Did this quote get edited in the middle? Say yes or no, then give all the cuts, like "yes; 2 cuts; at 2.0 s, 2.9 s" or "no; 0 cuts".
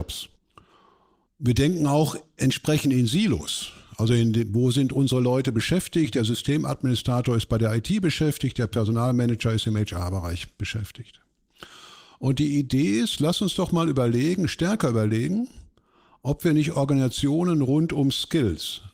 no; 0 cuts